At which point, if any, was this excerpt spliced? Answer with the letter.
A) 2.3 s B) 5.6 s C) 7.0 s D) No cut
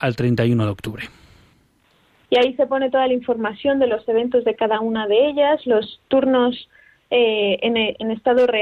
A